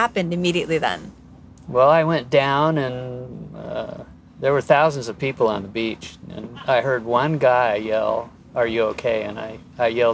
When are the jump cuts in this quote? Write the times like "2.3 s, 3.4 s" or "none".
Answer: none